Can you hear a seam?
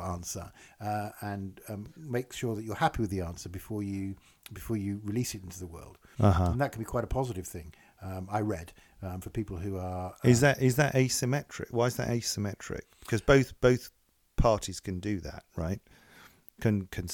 no; 0 cuts

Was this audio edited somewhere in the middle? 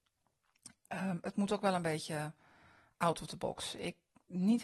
no; 0 cuts

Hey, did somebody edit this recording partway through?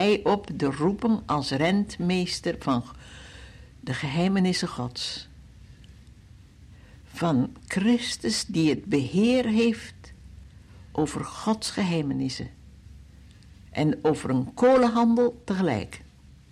no; 0 cuts

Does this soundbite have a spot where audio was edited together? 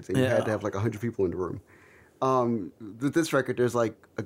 no; 0 cuts

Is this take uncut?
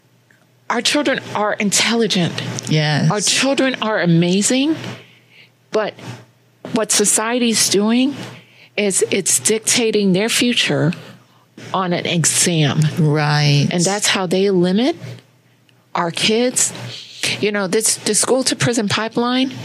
yes; 0 cuts

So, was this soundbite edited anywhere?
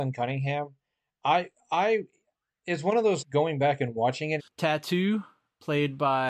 yes; 2 cuts; at 3.2 s, 4.4 s

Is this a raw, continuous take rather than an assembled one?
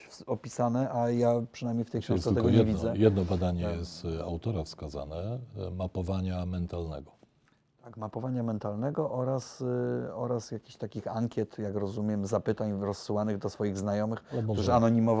yes; 0 cuts

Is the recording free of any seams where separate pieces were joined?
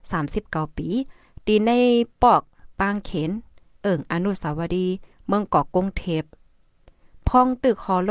yes; 0 cuts

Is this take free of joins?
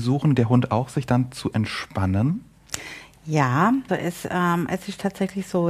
no; 1 cut; at 3.9 s

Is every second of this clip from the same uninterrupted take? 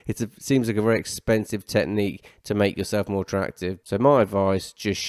no; 1 cut; at 3.8 s

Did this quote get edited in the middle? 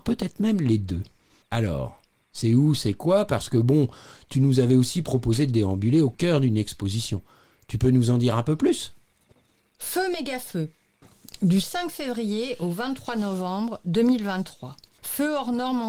no; 0 cuts

